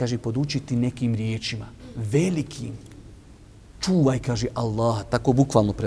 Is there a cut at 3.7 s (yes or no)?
yes